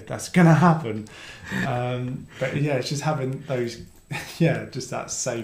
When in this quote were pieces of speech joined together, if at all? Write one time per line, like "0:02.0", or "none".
none